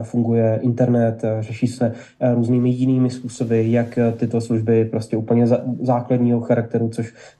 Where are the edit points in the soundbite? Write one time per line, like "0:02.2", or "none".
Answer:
none

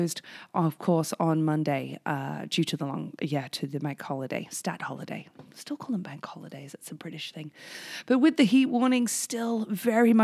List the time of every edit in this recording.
none

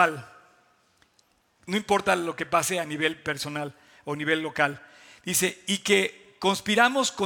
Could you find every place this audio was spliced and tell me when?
none

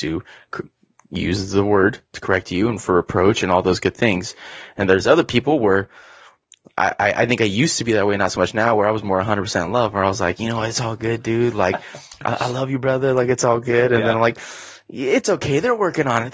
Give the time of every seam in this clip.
none

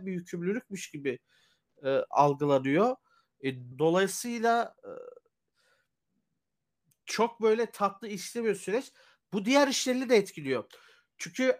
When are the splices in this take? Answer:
0:03.7

